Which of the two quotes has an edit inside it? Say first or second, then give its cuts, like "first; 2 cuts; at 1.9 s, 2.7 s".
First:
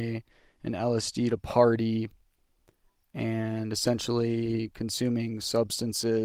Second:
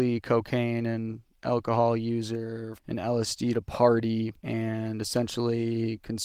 second; 2 cuts; at 2.8 s, 4.4 s